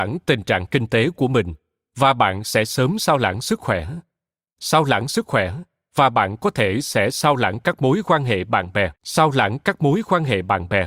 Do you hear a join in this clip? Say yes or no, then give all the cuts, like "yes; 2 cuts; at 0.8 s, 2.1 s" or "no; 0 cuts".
yes; 1 cut; at 9.0 s